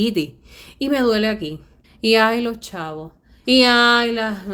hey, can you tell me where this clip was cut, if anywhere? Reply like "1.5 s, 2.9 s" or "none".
1.8 s, 3.4 s